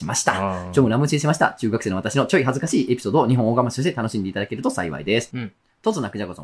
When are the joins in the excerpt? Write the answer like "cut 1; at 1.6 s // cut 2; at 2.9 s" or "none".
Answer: cut 1; at 5.3 s